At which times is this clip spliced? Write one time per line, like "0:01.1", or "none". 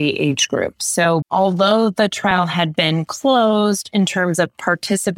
0:01.2